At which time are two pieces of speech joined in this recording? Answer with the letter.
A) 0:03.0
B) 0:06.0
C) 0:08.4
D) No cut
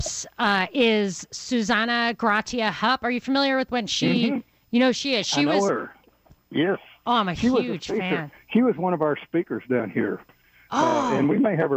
B